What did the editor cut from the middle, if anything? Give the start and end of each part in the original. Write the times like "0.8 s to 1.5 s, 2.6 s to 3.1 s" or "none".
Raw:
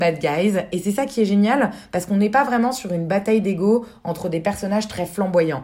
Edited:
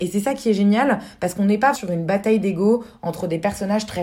2.4 s to 2.7 s